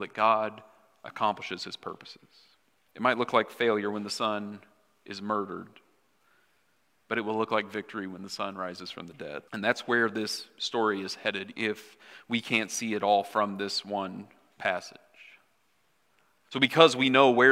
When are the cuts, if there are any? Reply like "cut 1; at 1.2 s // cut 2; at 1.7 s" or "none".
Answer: cut 1; at 2.9 s // cut 2; at 9.5 s // cut 3; at 11.5 s

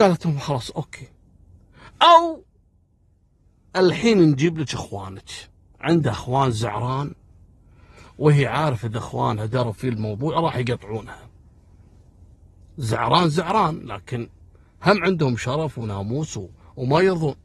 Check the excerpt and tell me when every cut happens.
none

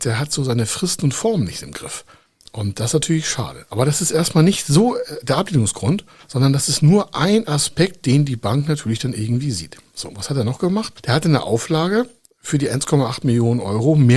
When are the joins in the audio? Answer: none

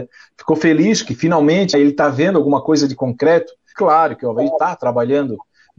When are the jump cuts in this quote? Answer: cut 1; at 1.7 s // cut 2; at 3.7 s

